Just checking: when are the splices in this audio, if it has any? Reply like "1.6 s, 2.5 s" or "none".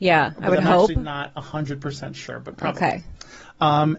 none